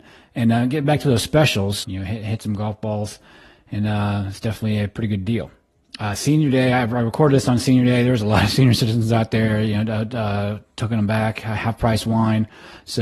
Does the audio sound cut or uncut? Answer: cut